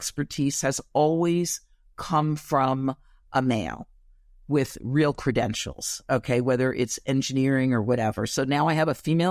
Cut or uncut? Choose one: uncut